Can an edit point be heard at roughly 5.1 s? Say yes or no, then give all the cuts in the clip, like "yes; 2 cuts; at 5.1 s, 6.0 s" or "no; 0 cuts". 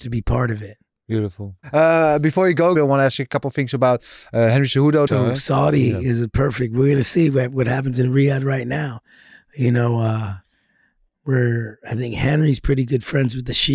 yes; 2 cuts; at 2.7 s, 5.1 s